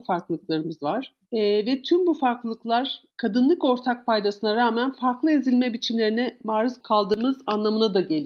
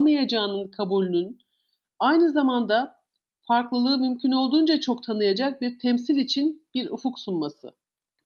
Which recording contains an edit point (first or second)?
first